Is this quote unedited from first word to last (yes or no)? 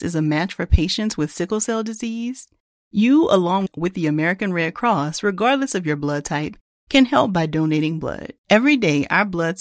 no